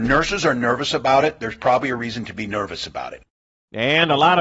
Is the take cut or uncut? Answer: uncut